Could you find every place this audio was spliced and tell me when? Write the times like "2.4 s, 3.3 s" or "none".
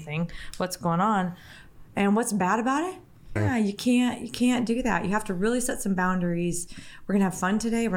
3.4 s